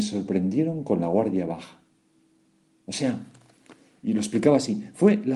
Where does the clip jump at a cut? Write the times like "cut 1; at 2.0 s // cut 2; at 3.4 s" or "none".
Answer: none